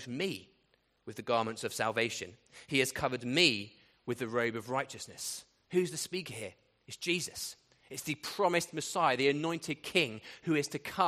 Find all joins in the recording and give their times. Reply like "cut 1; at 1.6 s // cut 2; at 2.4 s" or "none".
none